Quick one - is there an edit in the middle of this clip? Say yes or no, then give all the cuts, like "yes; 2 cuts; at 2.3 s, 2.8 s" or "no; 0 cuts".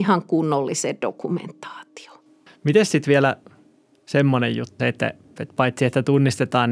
yes; 2 cuts; at 2.5 s, 4.8 s